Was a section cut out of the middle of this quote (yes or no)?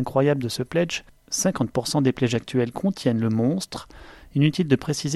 no